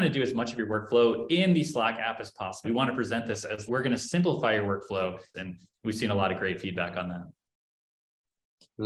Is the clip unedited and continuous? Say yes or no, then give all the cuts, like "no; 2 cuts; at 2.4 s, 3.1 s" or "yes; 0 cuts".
no; 3 cuts; at 2.6 s, 3.7 s, 5.3 s